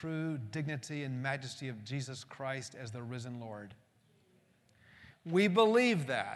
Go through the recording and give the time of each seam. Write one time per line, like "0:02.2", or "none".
0:05.1